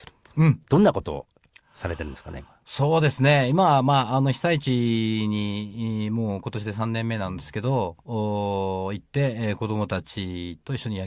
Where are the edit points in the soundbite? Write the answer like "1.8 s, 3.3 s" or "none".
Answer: none